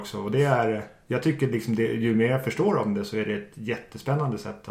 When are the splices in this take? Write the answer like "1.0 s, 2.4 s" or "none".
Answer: none